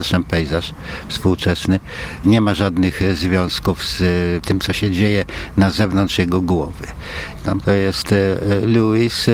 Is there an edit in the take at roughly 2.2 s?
no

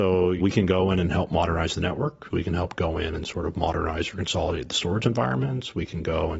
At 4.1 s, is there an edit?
no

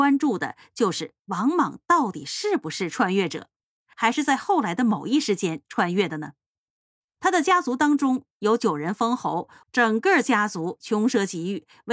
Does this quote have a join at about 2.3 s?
no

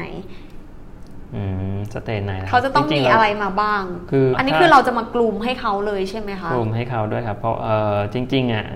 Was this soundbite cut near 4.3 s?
yes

